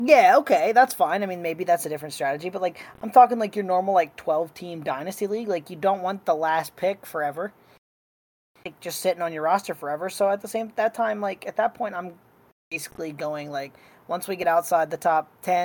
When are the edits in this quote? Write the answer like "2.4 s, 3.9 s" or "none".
none